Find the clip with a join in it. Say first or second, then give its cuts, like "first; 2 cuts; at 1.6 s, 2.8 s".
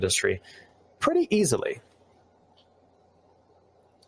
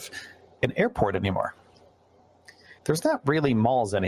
second; 1 cut; at 2.8 s